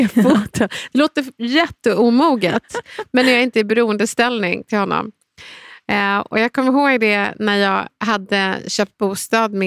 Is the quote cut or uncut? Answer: uncut